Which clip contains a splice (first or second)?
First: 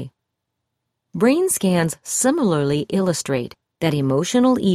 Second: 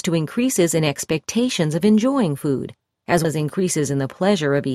second